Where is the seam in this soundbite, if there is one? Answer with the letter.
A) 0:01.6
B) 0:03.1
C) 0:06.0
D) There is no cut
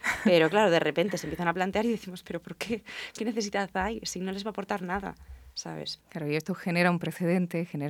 C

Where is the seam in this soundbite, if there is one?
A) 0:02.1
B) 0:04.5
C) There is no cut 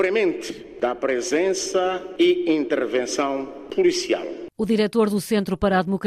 C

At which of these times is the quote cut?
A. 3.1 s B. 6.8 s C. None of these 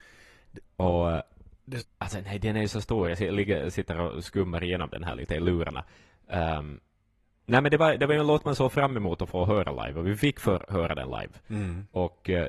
C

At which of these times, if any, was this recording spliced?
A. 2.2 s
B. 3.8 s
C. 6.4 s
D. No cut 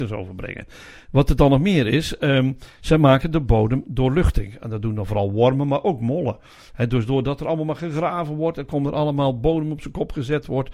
D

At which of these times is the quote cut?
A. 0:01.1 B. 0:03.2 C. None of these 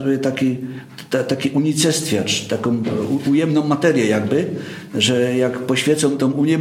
C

